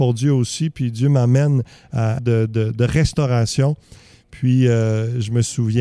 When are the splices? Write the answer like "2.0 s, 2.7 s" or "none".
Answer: 2.2 s